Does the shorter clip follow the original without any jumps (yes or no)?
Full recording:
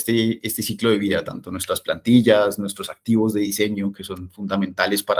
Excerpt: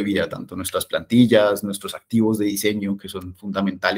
yes